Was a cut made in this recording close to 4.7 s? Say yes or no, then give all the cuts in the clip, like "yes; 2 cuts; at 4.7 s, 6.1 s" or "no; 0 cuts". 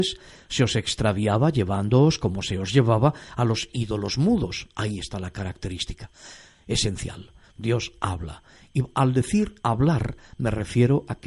no; 2 cuts; at 7.4 s, 9.6 s